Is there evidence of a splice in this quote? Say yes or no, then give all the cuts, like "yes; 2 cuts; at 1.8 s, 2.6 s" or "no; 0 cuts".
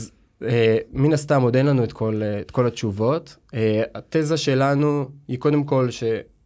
no; 0 cuts